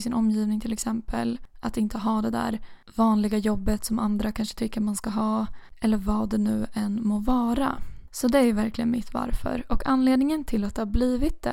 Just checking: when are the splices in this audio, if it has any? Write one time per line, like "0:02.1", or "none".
none

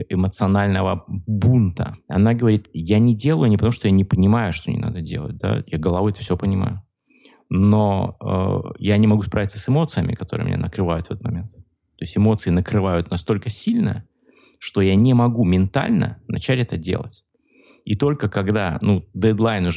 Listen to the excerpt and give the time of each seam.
none

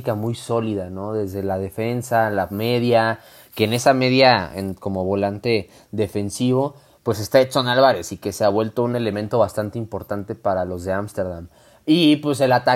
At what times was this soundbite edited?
none

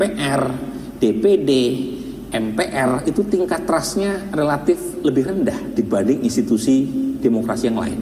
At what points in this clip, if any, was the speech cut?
none

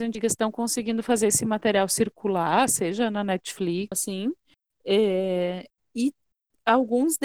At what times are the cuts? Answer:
0:03.9

